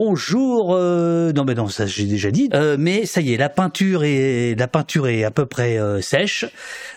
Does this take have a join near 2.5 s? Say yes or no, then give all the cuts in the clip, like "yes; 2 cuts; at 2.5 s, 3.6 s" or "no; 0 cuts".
yes; 1 cut; at 2.5 s